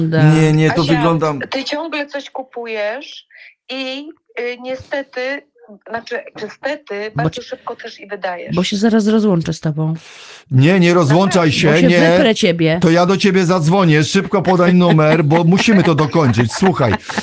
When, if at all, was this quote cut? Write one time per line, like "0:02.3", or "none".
none